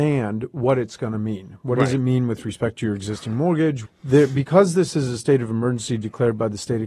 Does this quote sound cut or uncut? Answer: cut